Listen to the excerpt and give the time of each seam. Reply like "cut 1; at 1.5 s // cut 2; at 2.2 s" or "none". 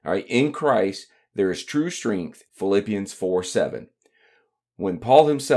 cut 1; at 2.5 s